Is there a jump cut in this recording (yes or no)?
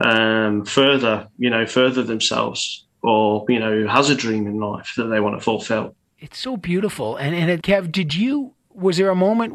yes